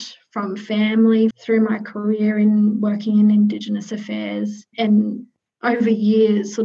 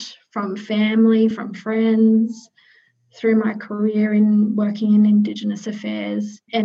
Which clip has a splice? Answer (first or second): first